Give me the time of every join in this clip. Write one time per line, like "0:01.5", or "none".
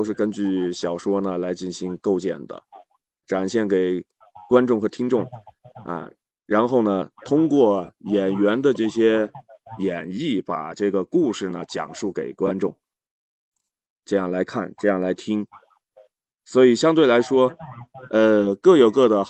0:03.2